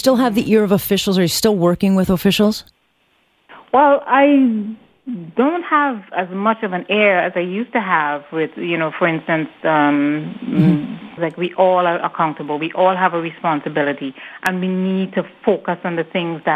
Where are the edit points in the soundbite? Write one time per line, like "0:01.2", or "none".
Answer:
0:11.2